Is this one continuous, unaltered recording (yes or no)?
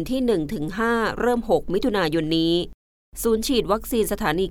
yes